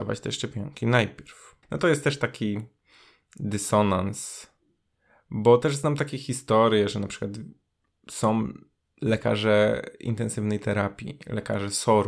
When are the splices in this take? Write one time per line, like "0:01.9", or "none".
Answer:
0:01.6